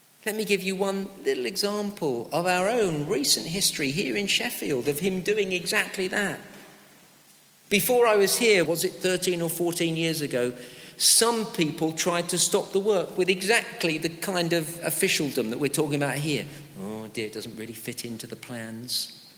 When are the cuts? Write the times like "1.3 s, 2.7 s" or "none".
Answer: 8.6 s